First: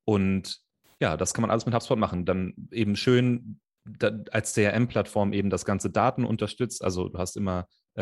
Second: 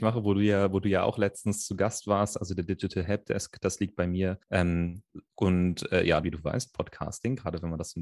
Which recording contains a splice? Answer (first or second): second